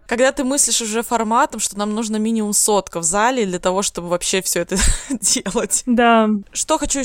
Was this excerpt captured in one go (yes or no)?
yes